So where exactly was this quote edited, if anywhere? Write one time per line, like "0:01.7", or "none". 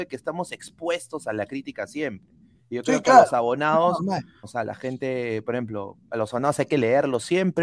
0:04.4
0:06.1

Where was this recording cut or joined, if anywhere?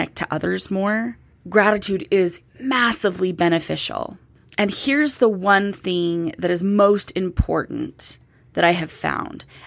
none

